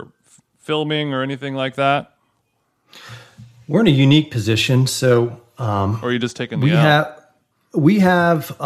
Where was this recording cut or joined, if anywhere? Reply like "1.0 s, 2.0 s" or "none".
none